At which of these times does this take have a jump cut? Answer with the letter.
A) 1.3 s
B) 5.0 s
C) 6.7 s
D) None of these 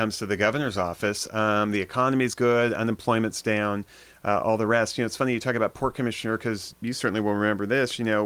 C